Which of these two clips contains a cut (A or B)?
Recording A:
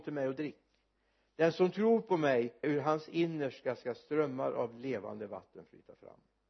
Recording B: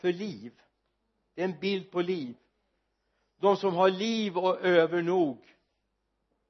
A